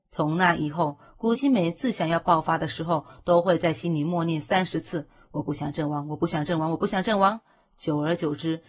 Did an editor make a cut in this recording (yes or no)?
yes